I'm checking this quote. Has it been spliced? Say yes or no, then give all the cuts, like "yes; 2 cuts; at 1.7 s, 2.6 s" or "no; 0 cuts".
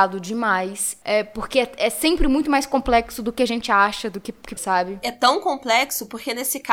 yes; 2 cuts; at 1.0 s, 4.6 s